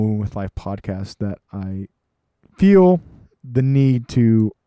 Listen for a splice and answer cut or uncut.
uncut